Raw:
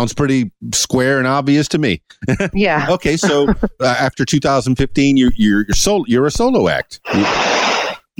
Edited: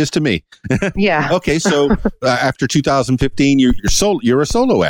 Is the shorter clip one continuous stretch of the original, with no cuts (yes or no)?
no